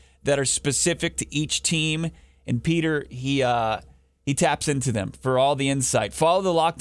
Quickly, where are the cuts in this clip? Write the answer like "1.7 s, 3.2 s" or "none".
none